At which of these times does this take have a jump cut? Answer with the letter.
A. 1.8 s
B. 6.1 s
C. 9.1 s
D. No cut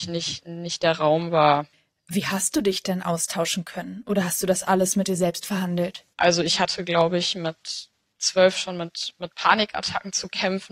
B